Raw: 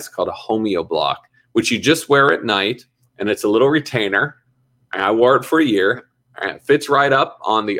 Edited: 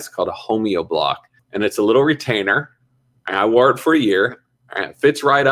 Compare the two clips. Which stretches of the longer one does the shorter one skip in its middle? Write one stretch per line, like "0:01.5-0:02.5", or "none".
0:01.4-0:03.0